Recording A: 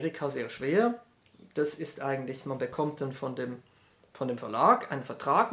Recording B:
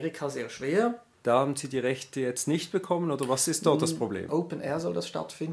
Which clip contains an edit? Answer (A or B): B